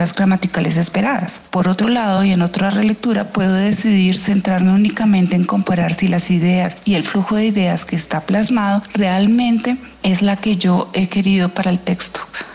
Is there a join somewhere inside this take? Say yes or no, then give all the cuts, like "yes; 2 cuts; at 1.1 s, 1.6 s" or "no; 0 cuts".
no; 0 cuts